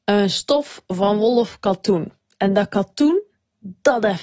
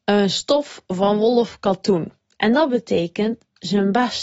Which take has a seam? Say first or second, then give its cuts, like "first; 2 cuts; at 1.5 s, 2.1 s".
second; 1 cut; at 2.3 s